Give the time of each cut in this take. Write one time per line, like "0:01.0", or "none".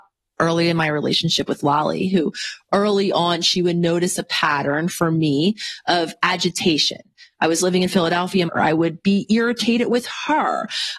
0:08.5